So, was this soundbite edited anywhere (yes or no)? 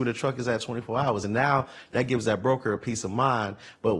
no